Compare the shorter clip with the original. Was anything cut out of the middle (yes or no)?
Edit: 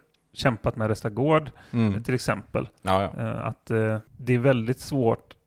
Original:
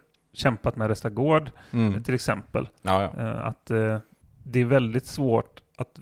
yes